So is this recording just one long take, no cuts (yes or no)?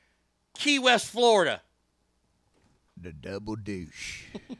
no